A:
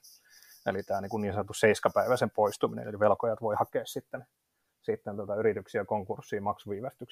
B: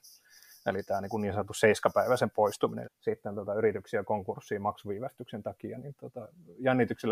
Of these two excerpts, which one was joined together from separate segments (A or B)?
B